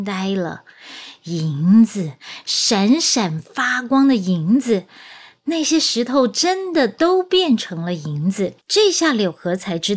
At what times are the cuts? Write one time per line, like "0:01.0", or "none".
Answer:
0:08.6